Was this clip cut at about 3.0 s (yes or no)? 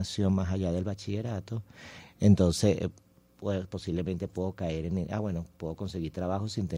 no